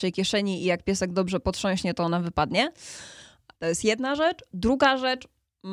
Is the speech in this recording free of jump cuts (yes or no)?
no